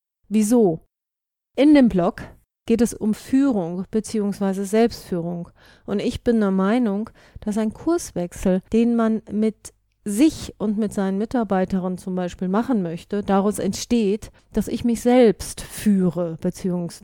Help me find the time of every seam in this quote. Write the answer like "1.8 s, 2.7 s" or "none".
none

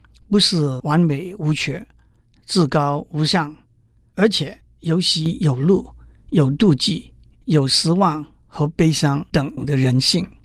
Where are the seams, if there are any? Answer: 7.3 s, 9.3 s

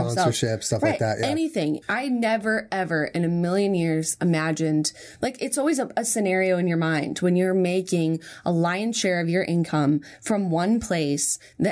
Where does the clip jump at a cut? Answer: 1.8 s

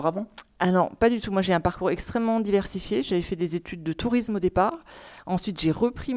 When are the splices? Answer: none

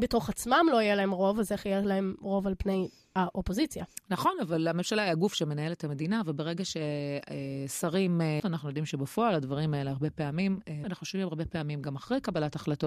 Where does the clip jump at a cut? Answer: 8.4 s, 10.8 s

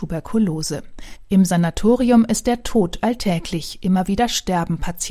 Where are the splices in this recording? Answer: none

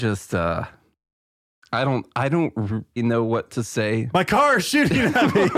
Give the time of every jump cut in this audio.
3.0 s

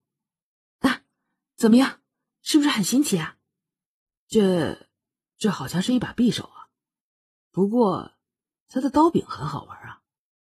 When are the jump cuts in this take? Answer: none

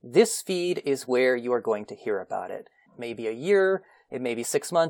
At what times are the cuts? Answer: 2.9 s

